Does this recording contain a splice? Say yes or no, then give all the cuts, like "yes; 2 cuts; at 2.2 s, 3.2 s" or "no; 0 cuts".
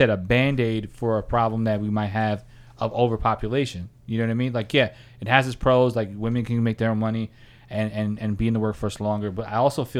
no; 0 cuts